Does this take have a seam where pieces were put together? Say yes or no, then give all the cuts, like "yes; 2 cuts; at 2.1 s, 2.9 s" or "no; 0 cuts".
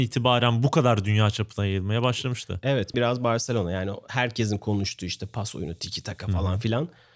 yes; 1 cut; at 2.9 s